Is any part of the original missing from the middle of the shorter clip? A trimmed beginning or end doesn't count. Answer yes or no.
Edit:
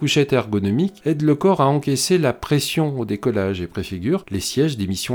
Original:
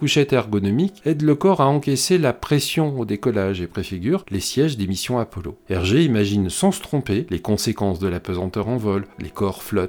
no